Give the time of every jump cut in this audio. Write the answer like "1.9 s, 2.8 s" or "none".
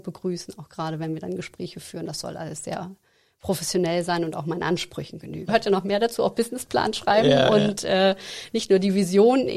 5.5 s